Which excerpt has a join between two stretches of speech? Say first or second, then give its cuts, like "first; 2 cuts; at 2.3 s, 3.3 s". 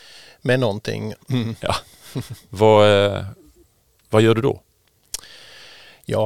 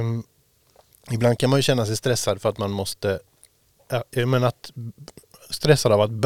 first; 1 cut; at 1.1 s